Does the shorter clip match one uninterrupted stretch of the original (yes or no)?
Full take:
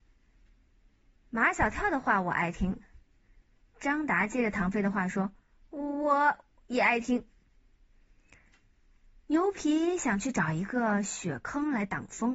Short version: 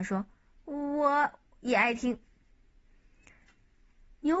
yes